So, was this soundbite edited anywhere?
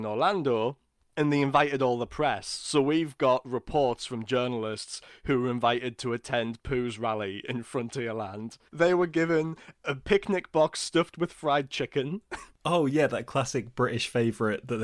yes; 1 cut; at 8.7 s

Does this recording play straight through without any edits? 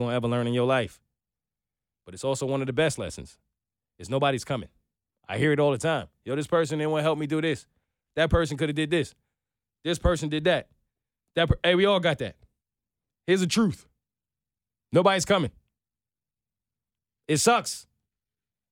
yes; 0 cuts

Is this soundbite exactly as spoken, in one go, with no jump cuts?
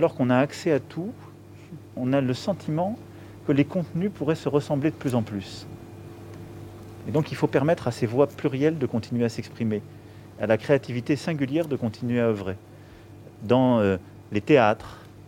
yes; 0 cuts

